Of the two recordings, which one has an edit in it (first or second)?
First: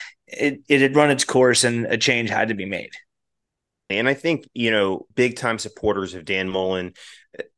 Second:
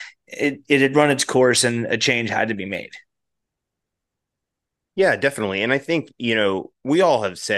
first